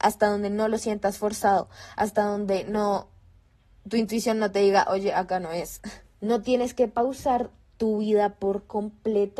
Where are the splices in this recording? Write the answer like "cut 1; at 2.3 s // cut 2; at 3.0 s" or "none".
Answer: none